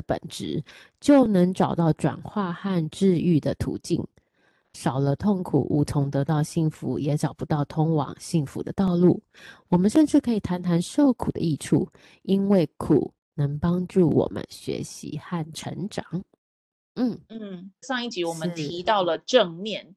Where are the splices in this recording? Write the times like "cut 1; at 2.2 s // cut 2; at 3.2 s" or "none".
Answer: cut 1; at 17.8 s